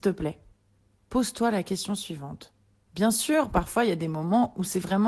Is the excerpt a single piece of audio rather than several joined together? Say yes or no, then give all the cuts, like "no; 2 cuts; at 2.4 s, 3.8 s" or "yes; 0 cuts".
no; 1 cut; at 2.9 s